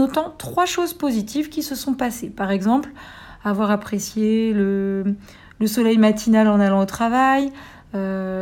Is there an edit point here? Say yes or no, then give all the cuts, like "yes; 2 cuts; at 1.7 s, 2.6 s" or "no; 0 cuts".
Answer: no; 0 cuts